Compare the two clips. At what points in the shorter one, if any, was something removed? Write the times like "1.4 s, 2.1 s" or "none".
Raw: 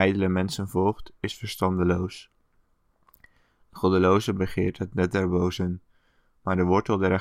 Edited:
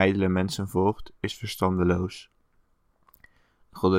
none